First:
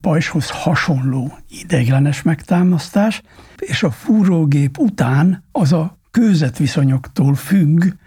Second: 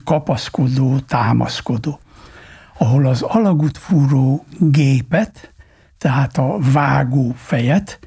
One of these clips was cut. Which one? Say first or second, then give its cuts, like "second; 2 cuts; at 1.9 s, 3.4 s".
first; 1 cut; at 3.6 s